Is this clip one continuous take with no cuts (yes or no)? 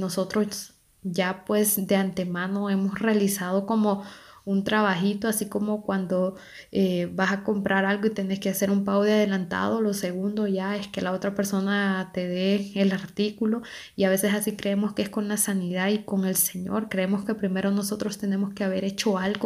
yes